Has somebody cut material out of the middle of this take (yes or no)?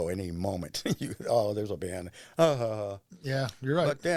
no